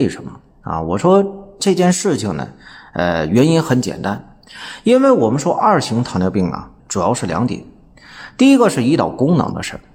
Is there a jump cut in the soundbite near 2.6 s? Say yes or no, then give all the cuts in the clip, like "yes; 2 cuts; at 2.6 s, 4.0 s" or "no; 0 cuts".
no; 1 cut; at 6.8 s